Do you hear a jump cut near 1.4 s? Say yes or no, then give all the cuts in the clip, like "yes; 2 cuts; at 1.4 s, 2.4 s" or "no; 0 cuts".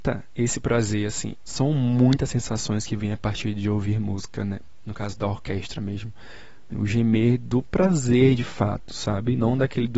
yes; 2 cuts; at 1.4 s, 6.7 s